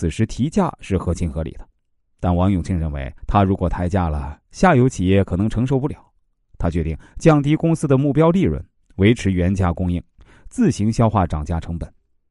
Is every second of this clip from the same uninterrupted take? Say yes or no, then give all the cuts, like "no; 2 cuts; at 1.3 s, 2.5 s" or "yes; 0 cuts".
no; 1 cut; at 3.2 s